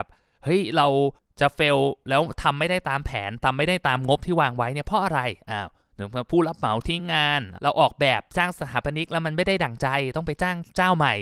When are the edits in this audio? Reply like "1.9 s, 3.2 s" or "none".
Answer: none

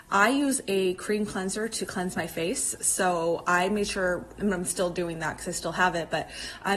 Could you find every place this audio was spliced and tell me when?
4.4 s

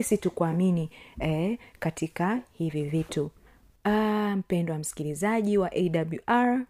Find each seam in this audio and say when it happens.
none

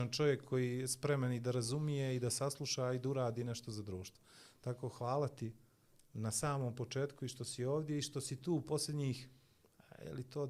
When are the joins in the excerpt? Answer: none

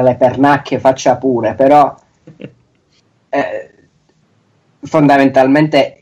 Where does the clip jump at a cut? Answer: none

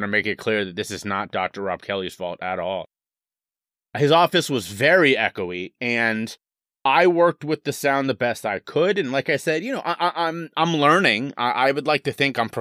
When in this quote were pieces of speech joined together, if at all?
none

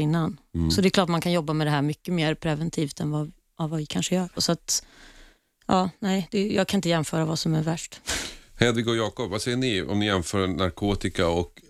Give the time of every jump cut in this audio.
4.4 s

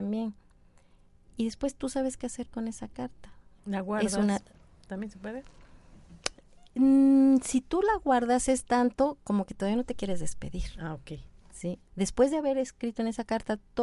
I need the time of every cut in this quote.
3.6 s, 11.9 s

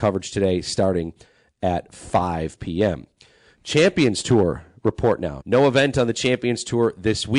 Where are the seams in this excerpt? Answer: 5.4 s

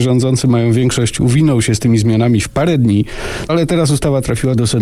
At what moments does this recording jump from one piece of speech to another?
3.5 s

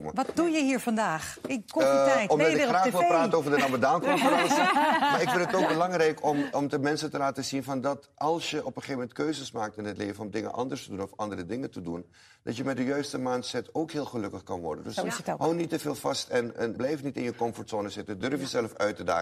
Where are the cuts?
16.8 s, 18.2 s

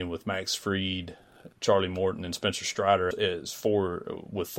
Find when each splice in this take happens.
1.5 s, 3.1 s

